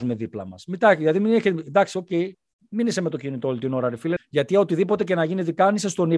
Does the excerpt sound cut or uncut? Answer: cut